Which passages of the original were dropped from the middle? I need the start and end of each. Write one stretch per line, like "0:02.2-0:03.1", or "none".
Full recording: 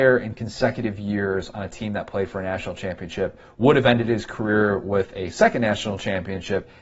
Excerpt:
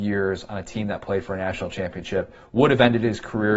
none

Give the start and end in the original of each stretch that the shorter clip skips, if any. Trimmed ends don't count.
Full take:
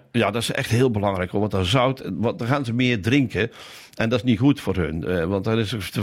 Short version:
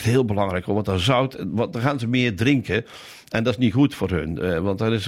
none

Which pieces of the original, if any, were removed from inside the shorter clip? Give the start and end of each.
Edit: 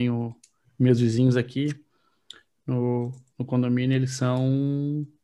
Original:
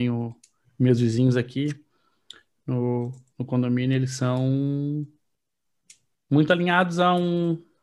none

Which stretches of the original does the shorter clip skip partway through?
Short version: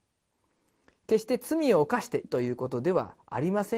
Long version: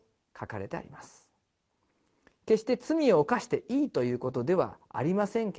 0:03.6-0:03.9

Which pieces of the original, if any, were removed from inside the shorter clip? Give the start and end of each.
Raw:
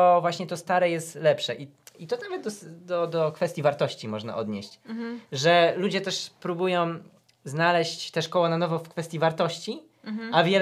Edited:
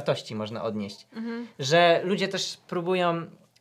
none

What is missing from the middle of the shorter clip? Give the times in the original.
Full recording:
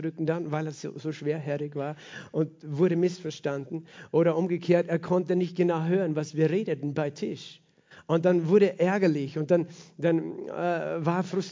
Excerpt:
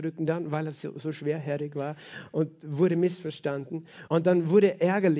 0:04.1-0:08.1

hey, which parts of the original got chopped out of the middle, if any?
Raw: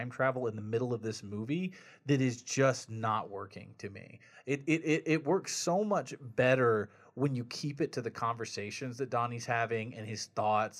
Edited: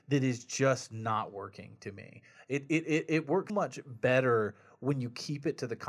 0:05.5-0:05.8

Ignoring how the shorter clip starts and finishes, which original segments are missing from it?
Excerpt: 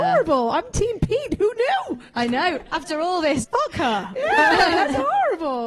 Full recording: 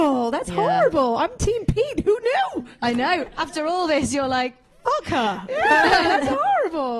0:04.1-0:04.8

